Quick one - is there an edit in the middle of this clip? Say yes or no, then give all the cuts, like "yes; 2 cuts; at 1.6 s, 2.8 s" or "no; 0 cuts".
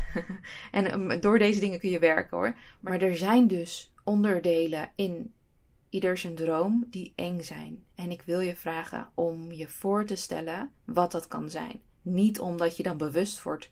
yes; 1 cut; at 10.8 s